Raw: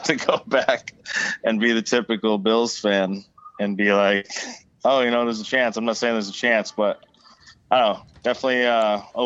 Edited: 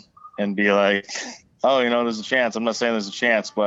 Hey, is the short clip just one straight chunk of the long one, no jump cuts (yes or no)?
yes